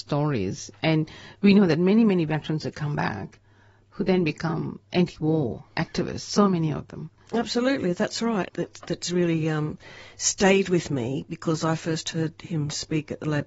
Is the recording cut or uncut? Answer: cut